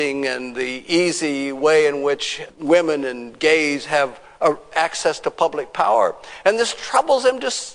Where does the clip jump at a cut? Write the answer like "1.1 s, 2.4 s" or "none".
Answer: 2.5 s